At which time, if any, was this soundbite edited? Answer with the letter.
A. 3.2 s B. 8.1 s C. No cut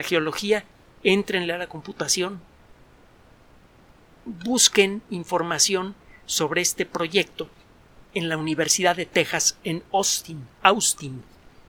B